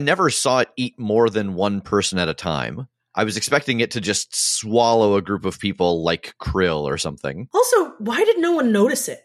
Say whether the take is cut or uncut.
uncut